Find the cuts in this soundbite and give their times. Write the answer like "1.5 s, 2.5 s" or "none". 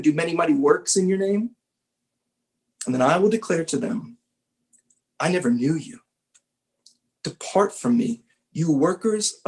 none